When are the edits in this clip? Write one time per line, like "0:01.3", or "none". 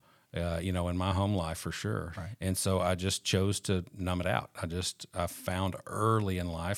0:02.1